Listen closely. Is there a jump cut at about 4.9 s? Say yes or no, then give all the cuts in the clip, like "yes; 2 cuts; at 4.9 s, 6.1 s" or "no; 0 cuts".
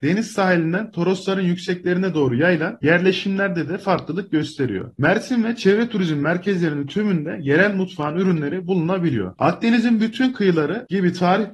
no; 1 cut; at 9.4 s